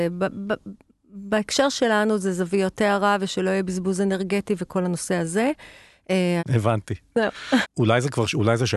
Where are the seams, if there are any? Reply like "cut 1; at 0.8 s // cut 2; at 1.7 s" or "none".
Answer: cut 1; at 6.4 s // cut 2; at 7.6 s